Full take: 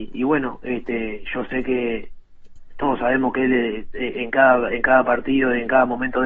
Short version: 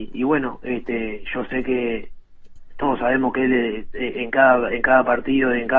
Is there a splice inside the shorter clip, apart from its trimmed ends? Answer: no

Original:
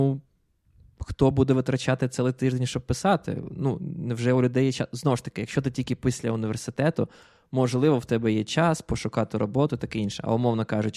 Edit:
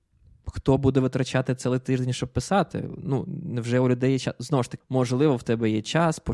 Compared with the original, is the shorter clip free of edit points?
no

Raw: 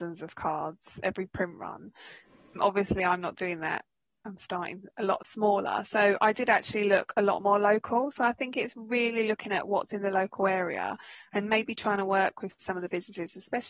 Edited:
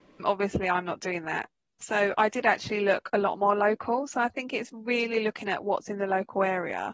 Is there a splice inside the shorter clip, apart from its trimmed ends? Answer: yes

